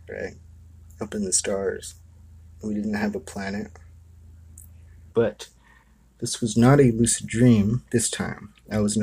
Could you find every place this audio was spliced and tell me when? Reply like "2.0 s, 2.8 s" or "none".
2.5 s, 5.1 s